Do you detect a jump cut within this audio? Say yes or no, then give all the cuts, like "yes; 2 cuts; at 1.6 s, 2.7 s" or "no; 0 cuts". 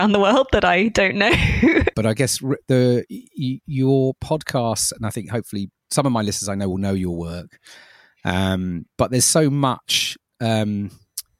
yes; 1 cut; at 1.9 s